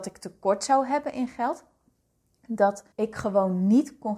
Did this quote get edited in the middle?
yes; 1 cut; at 2.9 s

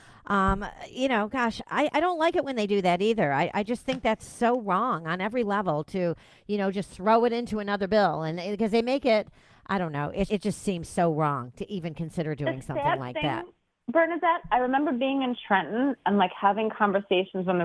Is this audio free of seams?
no; 1 cut; at 10.3 s

